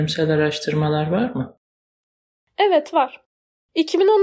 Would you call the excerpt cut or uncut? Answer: uncut